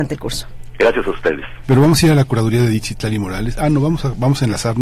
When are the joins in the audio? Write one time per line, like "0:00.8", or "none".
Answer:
0:01.6